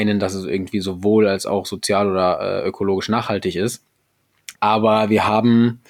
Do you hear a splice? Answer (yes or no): yes